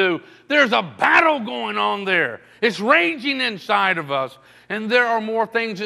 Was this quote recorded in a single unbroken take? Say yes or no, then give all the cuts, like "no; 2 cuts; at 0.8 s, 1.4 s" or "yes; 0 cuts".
yes; 0 cuts